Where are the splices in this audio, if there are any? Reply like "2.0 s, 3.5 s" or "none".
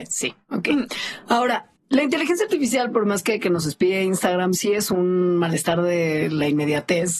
none